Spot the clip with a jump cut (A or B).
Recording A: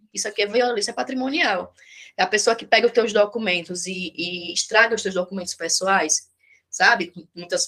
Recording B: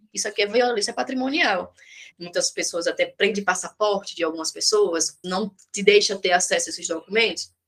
B